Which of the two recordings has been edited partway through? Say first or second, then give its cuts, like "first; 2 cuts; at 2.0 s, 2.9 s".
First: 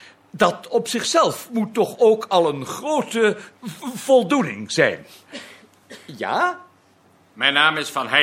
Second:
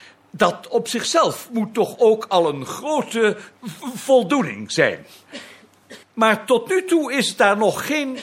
second; 1 cut; at 6.0 s